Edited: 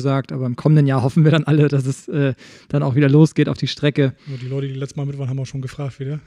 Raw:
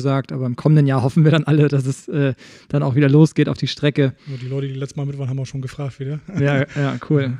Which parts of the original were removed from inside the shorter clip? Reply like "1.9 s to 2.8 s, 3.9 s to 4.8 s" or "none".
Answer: none